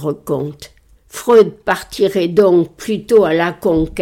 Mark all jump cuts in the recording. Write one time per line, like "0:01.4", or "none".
0:01.0